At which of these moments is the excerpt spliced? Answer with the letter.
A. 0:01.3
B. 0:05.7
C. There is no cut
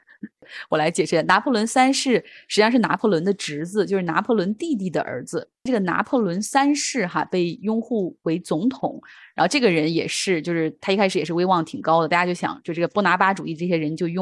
B